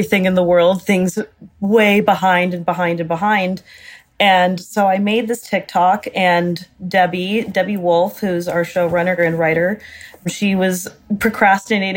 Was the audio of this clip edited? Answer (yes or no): yes